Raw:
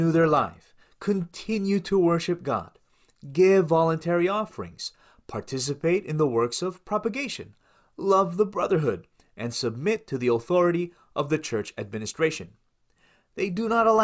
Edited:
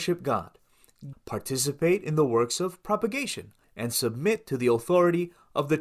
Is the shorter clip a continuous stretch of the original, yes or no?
no